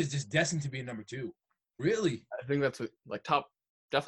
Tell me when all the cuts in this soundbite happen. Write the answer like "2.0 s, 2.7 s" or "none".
1.6 s, 3.0 s